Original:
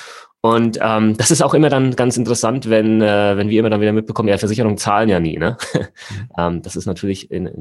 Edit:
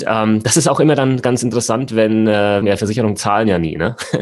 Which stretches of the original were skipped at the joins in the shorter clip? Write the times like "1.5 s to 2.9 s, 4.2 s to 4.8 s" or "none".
3.4 s to 4.2 s